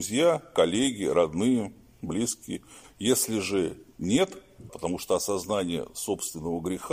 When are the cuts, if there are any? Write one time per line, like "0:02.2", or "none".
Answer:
0:02.8
0:04.7